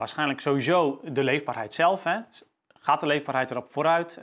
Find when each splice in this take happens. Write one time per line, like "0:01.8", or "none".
none